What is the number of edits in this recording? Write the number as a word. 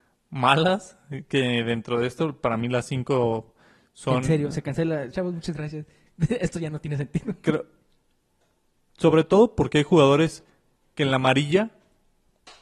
one